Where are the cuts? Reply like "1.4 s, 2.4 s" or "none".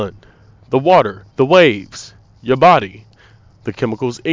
1.3 s